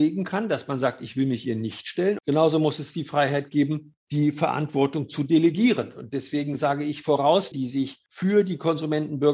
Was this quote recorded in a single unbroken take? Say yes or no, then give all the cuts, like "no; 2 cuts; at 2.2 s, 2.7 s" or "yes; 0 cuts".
no; 2 cuts; at 2.2 s, 7.5 s